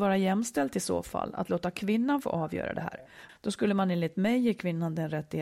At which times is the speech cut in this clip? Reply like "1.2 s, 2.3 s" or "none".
3.3 s